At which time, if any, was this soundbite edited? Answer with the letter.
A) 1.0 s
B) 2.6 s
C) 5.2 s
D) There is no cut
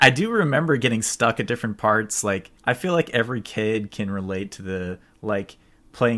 B